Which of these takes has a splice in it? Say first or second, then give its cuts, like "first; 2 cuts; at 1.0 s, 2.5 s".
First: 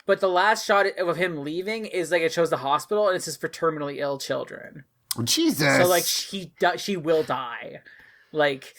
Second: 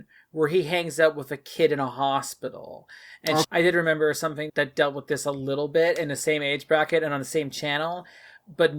second; 2 cuts; at 3.4 s, 4.5 s